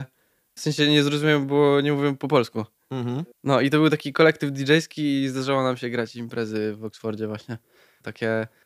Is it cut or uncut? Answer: uncut